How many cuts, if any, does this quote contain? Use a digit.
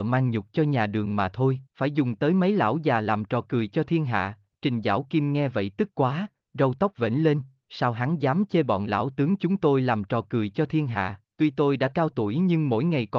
3